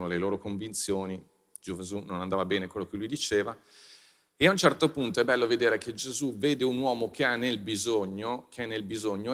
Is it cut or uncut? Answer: uncut